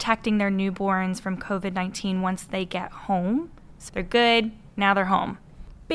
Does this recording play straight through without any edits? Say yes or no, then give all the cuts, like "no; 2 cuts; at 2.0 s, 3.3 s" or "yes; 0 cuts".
no; 1 cut; at 3.9 s